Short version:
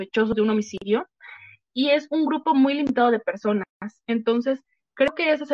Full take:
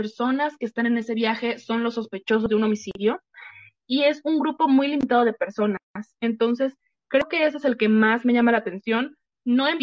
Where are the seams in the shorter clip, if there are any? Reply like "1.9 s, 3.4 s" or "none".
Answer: none